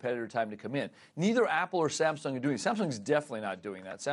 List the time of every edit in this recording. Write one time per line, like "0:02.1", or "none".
none